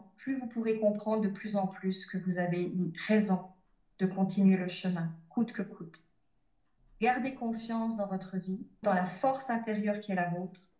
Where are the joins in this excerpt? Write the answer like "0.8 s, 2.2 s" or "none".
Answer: 6.8 s, 8.8 s